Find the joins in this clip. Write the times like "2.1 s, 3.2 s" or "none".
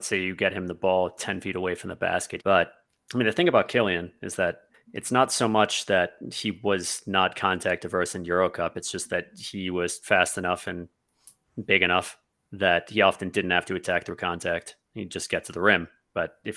2.4 s